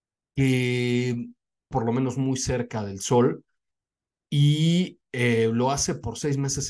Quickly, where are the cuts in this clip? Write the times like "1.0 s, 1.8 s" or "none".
1.7 s